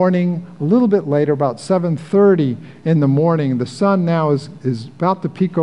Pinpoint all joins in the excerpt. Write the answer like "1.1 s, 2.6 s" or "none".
none